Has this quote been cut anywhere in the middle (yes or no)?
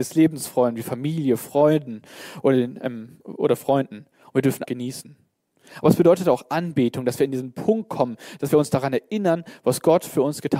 yes